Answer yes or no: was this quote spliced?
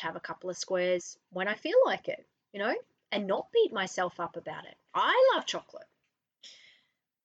yes